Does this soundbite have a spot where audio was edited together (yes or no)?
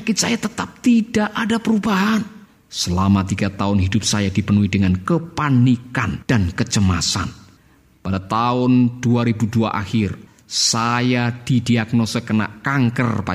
no